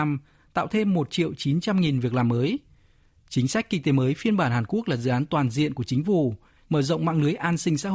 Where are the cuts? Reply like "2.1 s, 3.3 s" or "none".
6.6 s